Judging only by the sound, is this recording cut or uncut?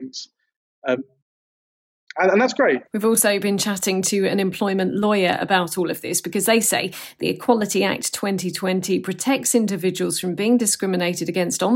cut